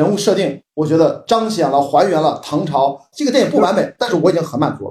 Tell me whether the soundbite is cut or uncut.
cut